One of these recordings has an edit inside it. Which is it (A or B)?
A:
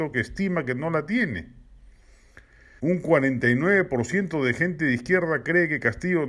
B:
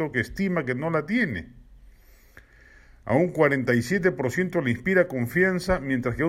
A